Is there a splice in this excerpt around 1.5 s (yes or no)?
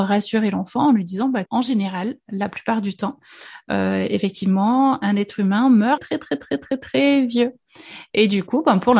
yes